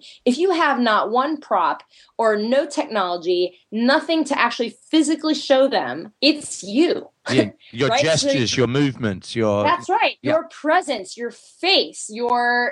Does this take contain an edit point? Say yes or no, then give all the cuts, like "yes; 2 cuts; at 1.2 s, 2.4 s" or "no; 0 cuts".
yes; 1 cut; at 6.2 s